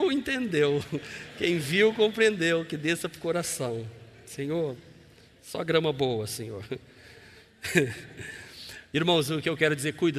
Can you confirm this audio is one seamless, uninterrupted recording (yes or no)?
yes